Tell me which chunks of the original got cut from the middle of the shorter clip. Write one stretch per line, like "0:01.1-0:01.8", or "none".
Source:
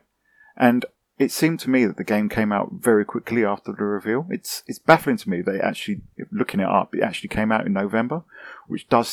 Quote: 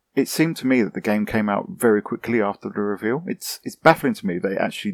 none